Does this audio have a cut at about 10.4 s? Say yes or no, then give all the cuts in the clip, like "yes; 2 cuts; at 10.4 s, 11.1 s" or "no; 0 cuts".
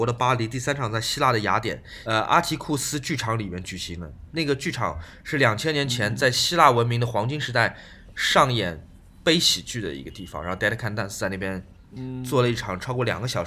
no; 1 cut; at 2.0 s